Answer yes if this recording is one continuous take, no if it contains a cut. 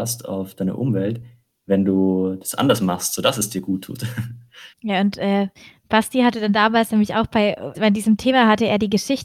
no